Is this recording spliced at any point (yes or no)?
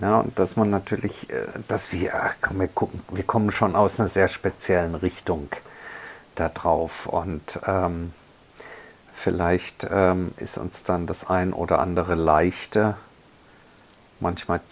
no